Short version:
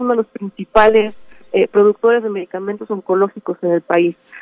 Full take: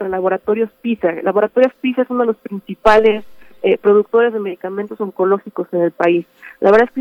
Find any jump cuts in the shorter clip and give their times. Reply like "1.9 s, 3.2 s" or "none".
none